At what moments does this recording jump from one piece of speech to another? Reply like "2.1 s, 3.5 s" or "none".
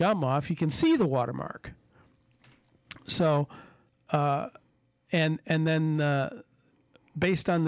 none